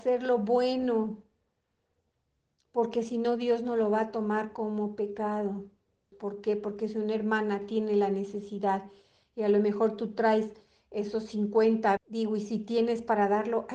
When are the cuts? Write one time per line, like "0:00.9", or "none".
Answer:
0:06.1
0:12.0

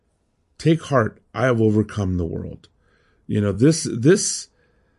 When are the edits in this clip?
none

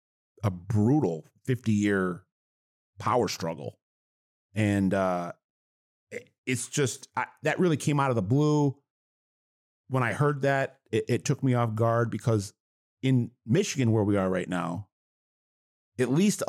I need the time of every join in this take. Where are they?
none

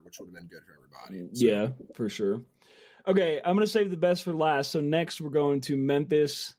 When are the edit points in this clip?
none

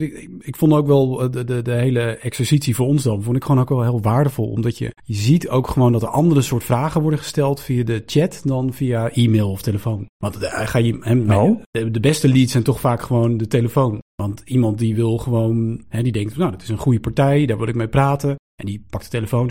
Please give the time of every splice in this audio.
none

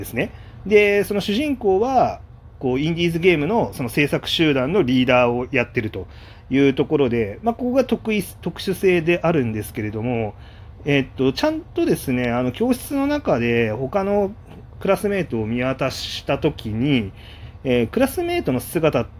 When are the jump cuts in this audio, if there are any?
none

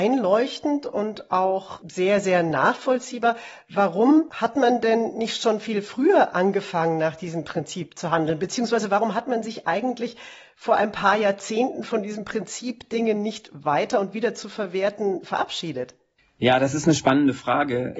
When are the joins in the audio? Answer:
none

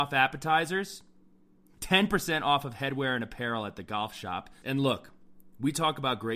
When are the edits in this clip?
0:01.8
0:04.6

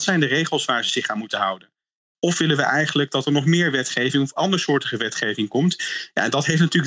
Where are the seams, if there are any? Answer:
0:02.1

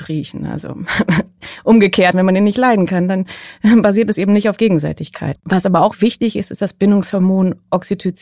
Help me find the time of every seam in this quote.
0:02.1
0:05.4

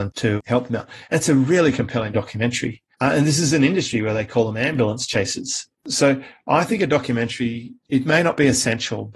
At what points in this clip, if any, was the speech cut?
none

